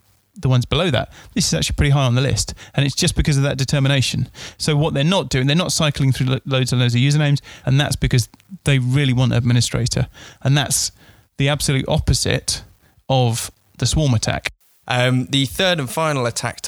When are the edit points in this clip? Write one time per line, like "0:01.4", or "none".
0:07.6
0:14.8